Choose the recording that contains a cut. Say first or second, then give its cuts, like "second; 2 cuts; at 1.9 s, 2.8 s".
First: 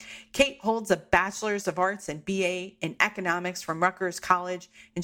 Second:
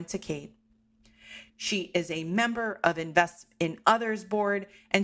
second; 1 cut; at 1.5 s